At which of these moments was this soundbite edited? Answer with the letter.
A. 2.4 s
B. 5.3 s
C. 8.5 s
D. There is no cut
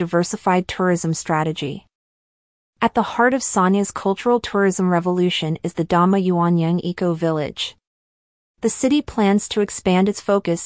C